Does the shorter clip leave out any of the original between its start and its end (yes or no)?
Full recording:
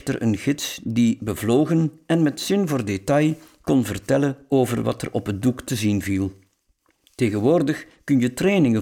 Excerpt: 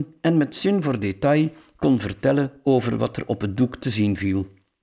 no